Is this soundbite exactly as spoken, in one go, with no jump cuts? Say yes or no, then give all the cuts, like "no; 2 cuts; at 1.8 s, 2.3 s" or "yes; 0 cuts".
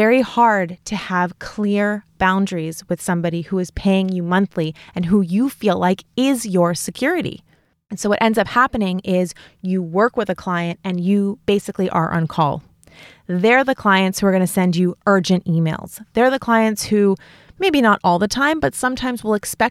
yes; 0 cuts